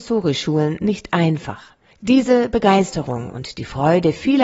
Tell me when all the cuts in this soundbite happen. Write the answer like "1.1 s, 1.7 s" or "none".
1.9 s